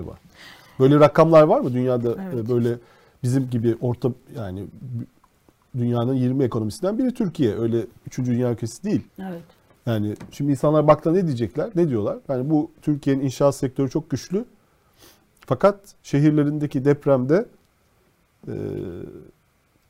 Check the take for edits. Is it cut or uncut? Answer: cut